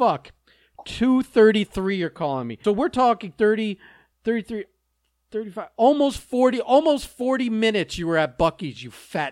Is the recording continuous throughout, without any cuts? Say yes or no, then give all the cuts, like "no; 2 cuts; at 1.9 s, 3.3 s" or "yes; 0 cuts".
no; 1 cut; at 2.6 s